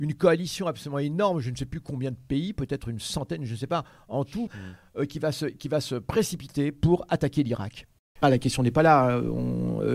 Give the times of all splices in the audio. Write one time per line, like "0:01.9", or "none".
0:04.5
0:08.2